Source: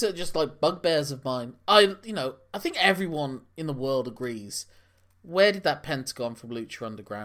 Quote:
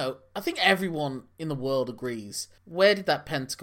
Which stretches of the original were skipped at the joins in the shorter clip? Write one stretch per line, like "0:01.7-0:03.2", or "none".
0:04.8-0:05.2